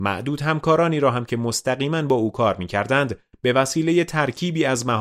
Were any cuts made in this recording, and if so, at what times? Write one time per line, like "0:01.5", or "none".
none